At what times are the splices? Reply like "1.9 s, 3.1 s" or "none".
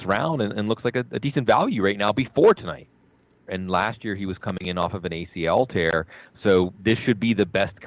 3.5 s